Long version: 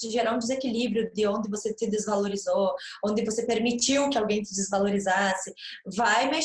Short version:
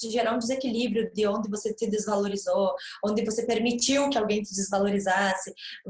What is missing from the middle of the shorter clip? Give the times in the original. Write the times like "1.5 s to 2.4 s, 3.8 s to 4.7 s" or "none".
none

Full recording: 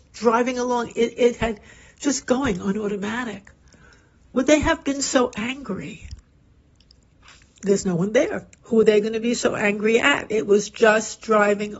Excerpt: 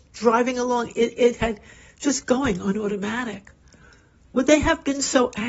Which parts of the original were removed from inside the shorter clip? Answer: none

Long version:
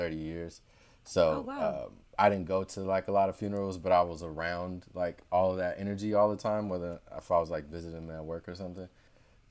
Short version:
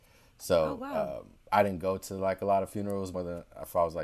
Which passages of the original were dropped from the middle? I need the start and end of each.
3.8 s to 6.7 s

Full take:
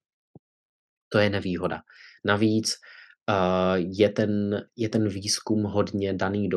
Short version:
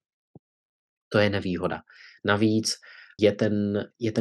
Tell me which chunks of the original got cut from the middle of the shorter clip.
3.2 s to 4.0 s

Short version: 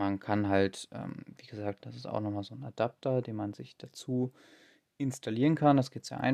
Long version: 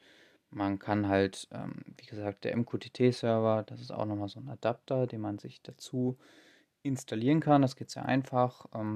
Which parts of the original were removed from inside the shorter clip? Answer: 2.4 s to 3.6 s

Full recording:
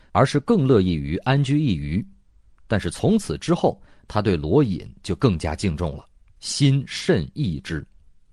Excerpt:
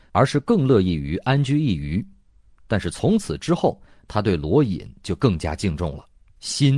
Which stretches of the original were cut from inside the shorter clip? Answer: none

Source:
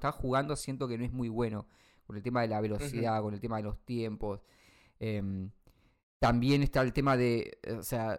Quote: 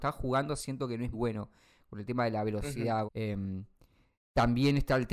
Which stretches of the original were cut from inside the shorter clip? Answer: 1.1 s to 1.3 s, 3.2 s to 4.9 s

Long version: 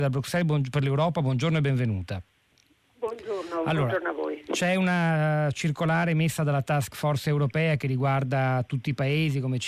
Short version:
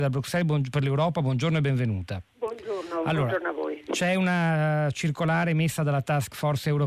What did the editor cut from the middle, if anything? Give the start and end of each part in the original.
2.3 s to 2.9 s

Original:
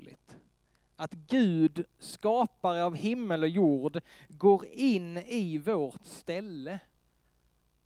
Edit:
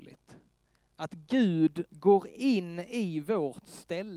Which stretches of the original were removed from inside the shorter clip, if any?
1.9 s to 4.3 s

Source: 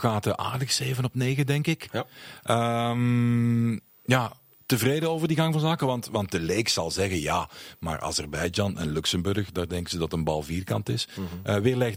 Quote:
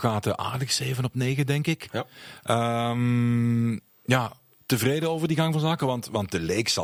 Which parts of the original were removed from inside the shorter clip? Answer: none

